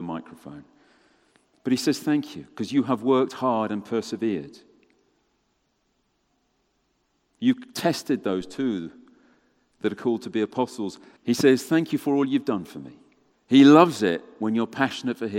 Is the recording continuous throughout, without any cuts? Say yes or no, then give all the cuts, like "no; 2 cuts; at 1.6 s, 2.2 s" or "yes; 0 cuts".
no; 2 cuts; at 11.2 s, 13.3 s